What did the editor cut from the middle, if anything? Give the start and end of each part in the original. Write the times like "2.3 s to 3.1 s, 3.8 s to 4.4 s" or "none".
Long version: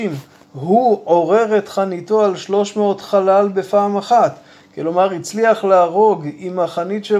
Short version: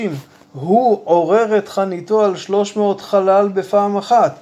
none